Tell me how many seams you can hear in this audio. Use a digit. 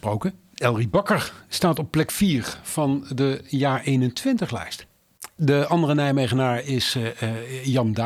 1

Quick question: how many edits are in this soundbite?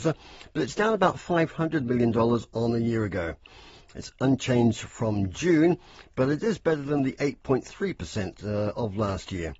1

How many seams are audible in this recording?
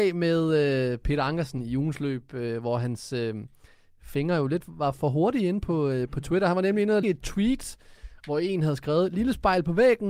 1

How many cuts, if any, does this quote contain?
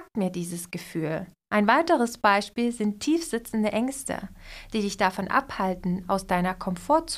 1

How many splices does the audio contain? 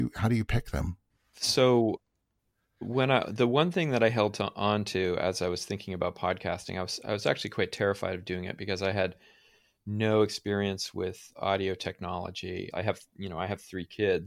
1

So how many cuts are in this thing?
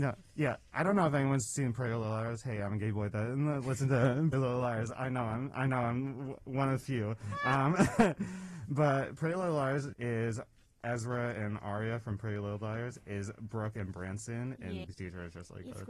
3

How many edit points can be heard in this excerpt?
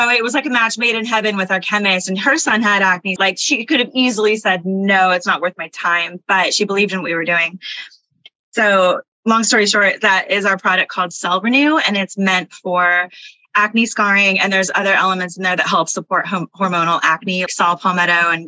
2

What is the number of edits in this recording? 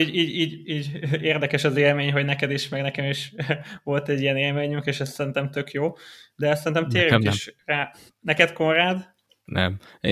0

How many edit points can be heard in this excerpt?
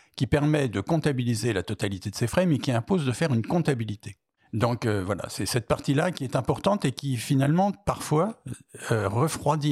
0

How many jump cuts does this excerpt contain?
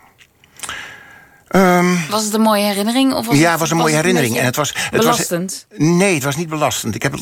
0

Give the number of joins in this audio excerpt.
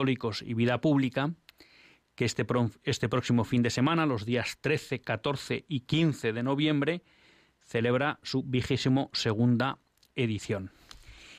0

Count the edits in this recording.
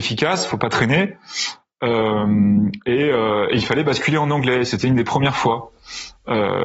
0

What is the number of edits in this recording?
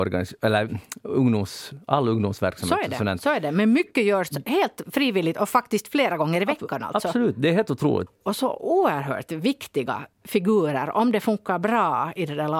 1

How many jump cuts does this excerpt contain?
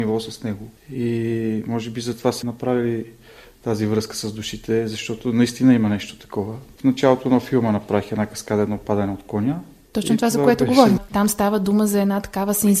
2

